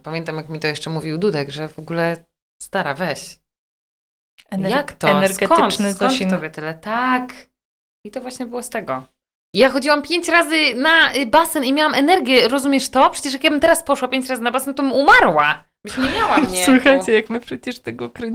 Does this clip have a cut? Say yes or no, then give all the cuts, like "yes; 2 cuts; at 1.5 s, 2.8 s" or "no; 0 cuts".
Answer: no; 0 cuts